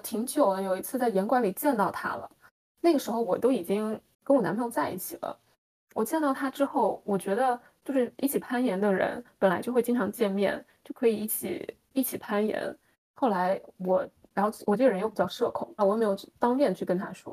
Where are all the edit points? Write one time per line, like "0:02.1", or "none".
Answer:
0:13.0
0:15.8